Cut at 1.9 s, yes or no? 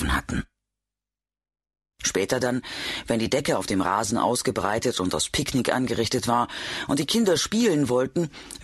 yes